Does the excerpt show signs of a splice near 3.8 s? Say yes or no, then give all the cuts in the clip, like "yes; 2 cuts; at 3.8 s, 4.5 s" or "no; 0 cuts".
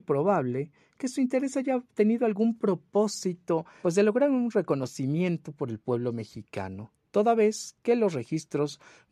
yes; 1 cut; at 3.8 s